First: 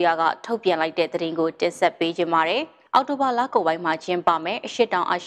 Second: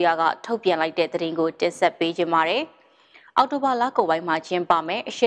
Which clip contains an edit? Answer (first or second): first